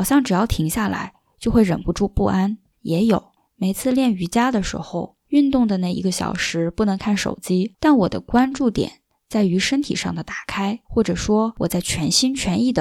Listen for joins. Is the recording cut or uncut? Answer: cut